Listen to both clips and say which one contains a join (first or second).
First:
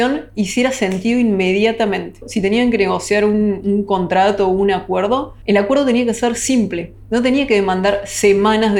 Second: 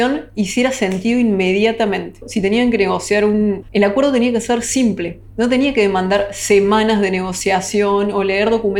second